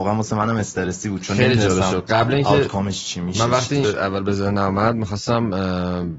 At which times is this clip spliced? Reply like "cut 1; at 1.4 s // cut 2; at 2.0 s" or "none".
cut 1; at 3.8 s